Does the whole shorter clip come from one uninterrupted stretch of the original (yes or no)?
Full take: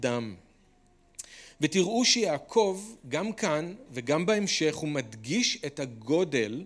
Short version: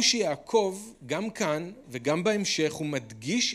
yes